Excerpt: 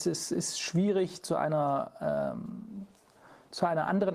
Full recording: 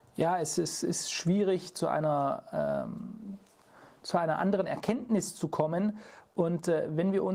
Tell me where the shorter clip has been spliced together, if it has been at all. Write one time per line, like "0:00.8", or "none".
none